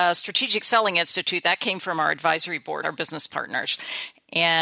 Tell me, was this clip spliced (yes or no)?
yes